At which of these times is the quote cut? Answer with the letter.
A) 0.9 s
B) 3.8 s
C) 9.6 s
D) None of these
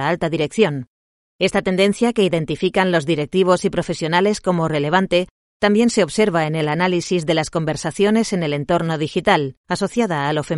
C